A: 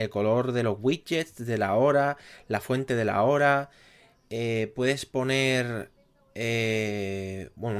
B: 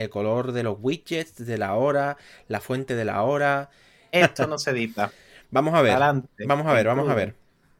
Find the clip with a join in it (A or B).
B